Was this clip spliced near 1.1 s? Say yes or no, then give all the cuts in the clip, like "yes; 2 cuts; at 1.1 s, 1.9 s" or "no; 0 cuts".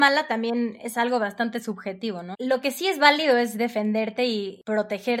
no; 1 cut; at 2.3 s